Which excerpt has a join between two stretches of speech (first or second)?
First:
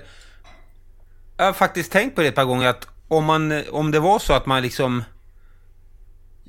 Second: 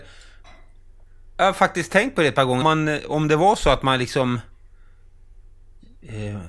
second